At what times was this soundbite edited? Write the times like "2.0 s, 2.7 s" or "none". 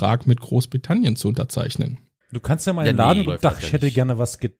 2.2 s, 3.2 s